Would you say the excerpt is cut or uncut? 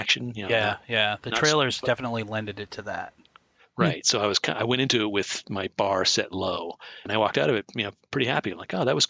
cut